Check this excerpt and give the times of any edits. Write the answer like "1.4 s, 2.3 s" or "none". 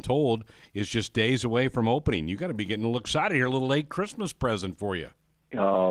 none